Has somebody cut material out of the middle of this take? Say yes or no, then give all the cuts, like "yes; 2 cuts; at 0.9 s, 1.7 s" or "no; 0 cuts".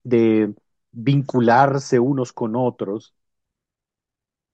no; 0 cuts